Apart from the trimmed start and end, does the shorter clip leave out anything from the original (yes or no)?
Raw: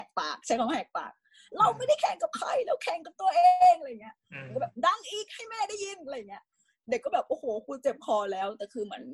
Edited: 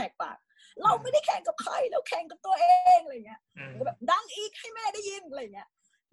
no